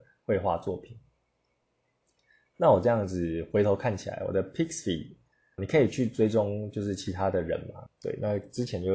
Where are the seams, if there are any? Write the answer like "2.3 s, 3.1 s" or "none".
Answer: 5.6 s, 7.9 s